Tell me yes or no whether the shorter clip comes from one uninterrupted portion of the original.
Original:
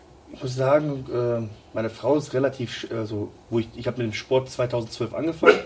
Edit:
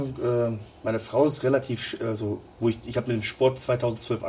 yes